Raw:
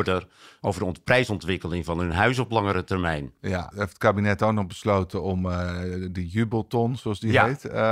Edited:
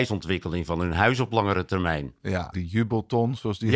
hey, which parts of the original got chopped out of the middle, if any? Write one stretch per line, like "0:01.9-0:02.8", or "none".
0:03.7-0:06.1

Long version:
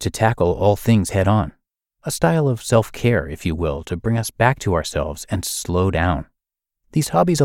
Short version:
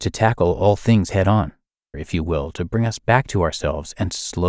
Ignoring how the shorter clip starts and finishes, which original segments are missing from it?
0:01.9-0:03.3

